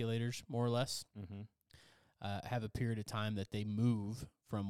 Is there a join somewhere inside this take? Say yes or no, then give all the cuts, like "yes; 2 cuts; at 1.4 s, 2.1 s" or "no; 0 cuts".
no; 0 cuts